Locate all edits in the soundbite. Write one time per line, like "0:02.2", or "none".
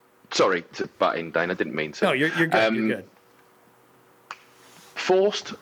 none